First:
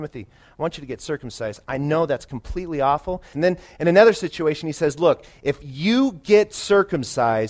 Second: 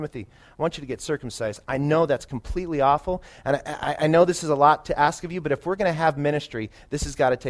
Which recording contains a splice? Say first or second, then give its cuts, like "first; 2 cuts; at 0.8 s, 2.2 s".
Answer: first; 1 cut; at 3.3 s